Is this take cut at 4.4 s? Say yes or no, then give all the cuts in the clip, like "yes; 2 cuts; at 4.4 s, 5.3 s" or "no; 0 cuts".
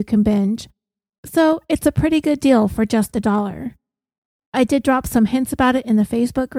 yes; 1 cut; at 4.4 s